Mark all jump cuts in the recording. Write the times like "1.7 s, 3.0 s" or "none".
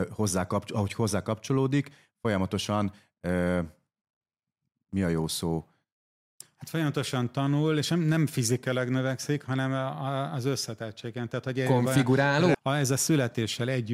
12.5 s